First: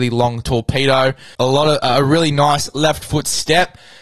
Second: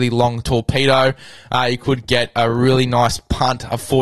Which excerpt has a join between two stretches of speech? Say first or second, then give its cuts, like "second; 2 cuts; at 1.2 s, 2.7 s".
first; 1 cut; at 1.3 s